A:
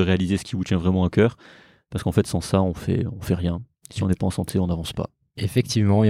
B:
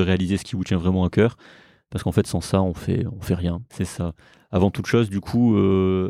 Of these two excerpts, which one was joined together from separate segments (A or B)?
B